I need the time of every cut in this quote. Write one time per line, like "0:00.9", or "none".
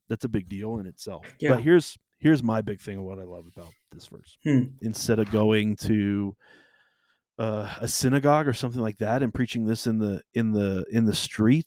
0:04.8